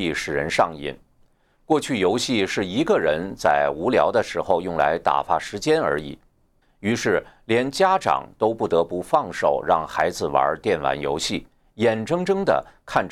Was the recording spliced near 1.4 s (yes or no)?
no